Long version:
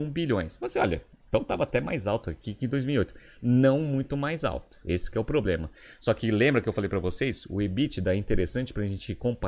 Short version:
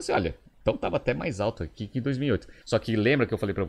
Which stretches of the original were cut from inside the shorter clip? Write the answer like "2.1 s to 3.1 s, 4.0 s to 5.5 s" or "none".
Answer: 3.3 s to 6.0 s

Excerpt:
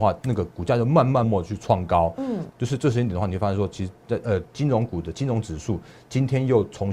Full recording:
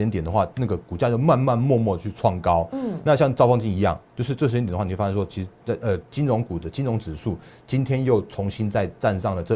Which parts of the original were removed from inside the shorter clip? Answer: 1.6 s to 1.8 s, 3.0 s to 4.1 s

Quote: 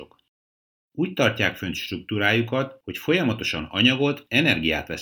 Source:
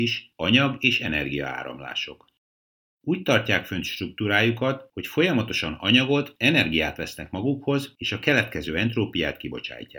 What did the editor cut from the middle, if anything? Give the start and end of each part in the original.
none

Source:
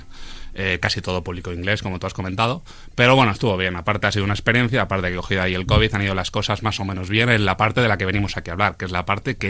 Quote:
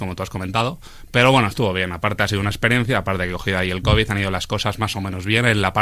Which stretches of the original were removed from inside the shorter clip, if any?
none

